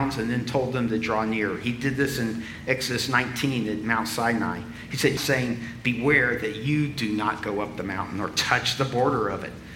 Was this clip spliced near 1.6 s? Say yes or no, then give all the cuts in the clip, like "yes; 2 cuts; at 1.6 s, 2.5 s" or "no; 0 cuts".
no; 1 cut; at 5.2 s